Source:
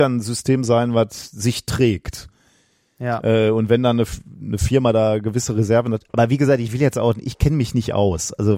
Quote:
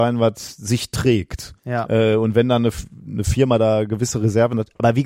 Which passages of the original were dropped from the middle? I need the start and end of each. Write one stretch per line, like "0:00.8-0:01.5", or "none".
0:02.3-0:02.9